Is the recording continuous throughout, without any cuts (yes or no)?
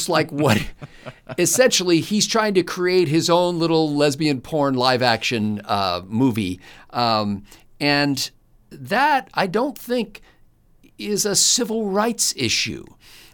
yes